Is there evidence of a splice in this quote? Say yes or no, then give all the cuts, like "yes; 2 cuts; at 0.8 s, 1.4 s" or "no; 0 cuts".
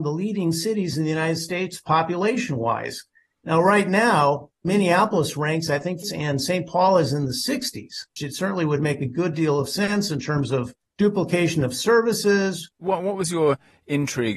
yes; 3 cuts; at 6.0 s, 8.2 s, 12.7 s